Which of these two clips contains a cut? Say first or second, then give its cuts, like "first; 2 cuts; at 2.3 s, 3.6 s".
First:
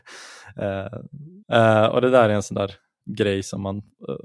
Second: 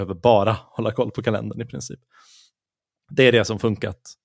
first; 2 cuts; at 1.4 s, 3.0 s